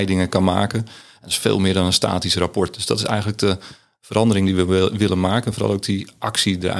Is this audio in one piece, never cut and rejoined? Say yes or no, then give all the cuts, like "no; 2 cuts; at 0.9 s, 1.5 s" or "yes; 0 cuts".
yes; 0 cuts